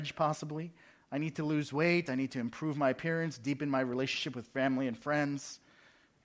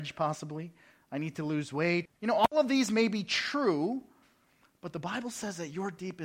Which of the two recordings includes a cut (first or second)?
second